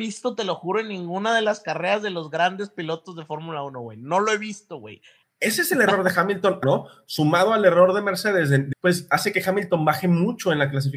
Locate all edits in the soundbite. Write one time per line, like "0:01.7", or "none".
0:05.2
0:06.6
0:08.7